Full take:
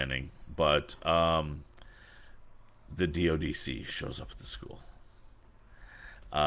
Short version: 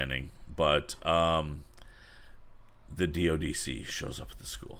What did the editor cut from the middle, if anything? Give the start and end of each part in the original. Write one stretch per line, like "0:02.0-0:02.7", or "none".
none